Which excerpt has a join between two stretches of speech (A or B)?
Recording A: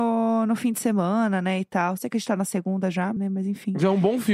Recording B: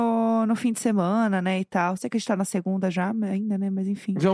A